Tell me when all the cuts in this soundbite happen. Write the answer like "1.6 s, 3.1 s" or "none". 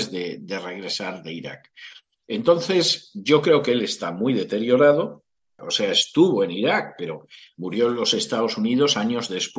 2.1 s, 5.6 s